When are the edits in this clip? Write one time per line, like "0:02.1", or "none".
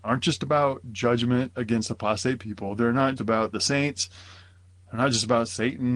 0:03.2